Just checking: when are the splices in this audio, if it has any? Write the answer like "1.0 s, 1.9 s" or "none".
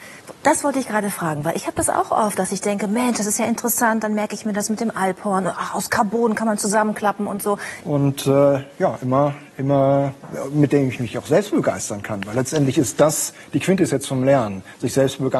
7.8 s